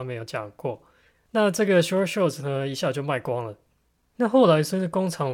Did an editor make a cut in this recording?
yes; 1 cut; at 4.1 s

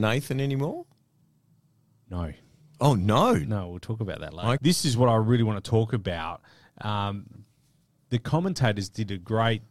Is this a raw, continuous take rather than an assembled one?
no; 1 cut; at 4.6 s

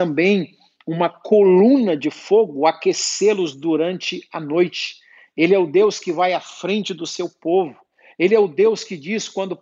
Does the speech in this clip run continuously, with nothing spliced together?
yes; 0 cuts

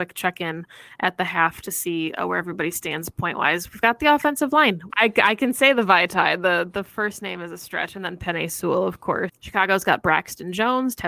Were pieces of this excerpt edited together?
yes; 2 cuts; at 4.9 s, 9.3 s

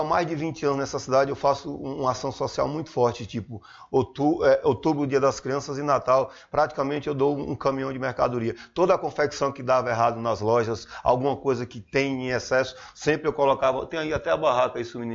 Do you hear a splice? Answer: no; 0 cuts

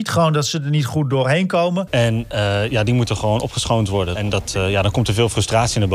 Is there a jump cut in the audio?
yes; 2 cuts; at 1.9 s, 4.2 s

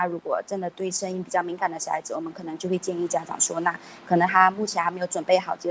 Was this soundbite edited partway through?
no; 0 cuts

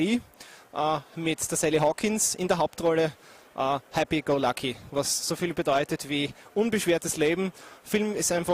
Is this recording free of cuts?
yes; 0 cuts

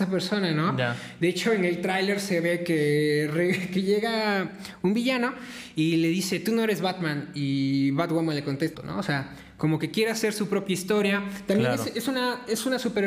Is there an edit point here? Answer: yes; 1 cut; at 8.7 s

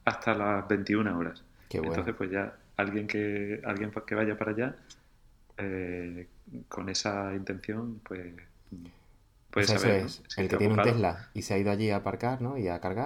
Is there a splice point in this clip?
no; 0 cuts

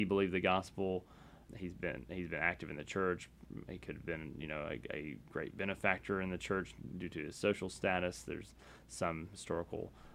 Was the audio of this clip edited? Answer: yes; 1 cut; at 1.5 s

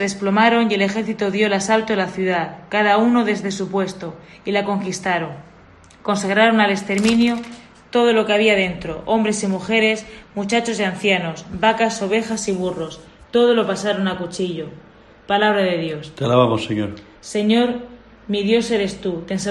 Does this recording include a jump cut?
no; 0 cuts

